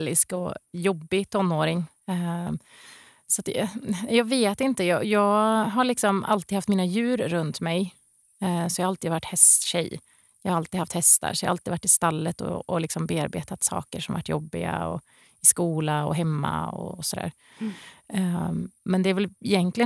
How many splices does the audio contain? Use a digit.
0